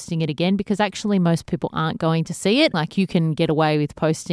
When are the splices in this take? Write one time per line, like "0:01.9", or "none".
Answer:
0:02.7